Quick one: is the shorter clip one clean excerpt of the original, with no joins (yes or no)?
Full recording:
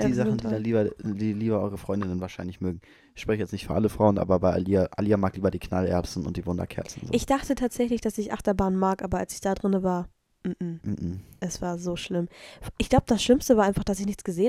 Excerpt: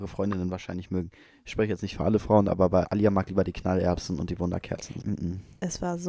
no